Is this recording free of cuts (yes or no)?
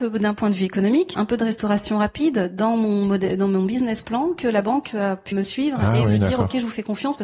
no